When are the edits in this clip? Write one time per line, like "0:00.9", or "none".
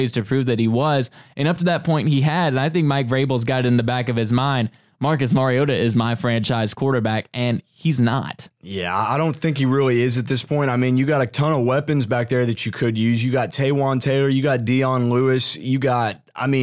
none